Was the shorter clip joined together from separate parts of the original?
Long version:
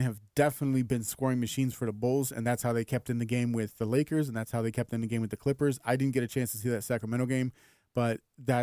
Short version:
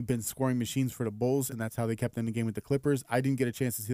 yes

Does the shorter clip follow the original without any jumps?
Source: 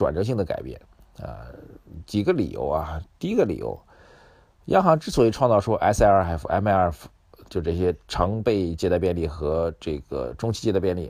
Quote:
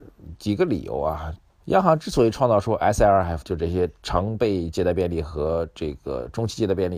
no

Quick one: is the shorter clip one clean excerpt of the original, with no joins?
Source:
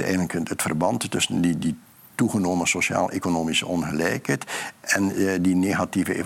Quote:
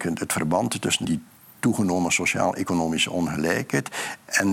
no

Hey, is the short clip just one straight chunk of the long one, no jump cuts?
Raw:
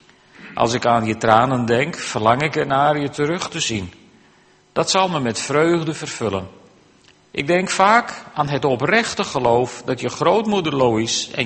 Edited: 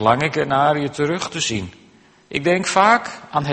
no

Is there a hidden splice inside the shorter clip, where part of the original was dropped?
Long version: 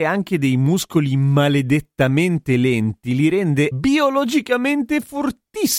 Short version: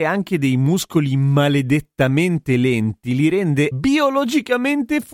no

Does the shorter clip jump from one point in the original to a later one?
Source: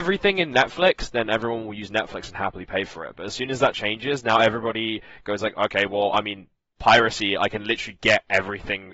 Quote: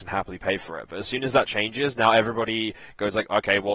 no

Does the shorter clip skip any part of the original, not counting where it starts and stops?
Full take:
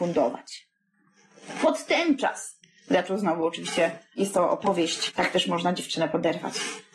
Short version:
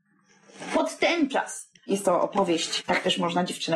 yes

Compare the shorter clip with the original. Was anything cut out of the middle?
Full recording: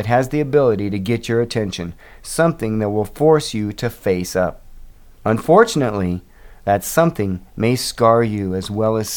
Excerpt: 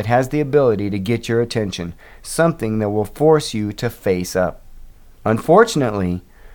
no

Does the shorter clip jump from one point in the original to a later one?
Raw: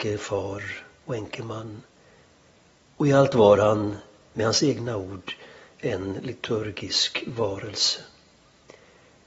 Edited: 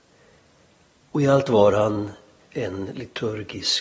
yes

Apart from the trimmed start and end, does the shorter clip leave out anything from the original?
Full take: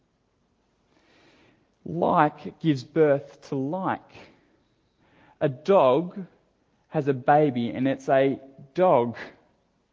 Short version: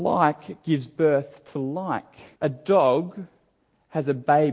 yes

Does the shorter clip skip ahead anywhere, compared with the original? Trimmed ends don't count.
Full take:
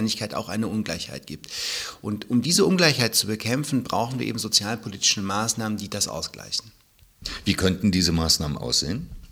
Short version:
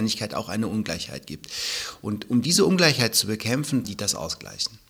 yes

